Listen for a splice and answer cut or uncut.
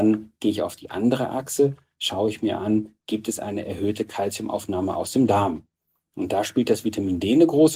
uncut